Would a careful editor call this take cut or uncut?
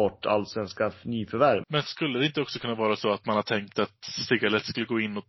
cut